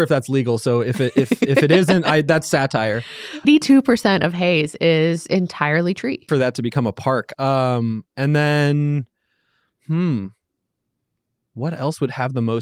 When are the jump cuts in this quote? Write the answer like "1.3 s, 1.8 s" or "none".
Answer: 3.4 s, 6.3 s, 7.3 s